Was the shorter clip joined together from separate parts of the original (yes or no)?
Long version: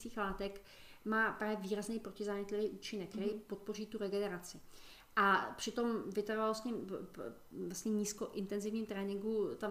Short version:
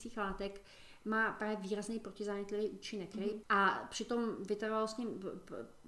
yes